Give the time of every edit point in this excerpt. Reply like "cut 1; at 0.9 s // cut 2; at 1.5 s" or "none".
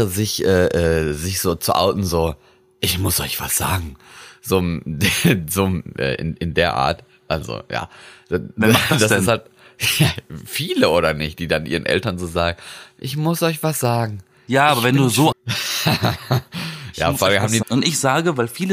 cut 1; at 15.3 s // cut 2; at 17.6 s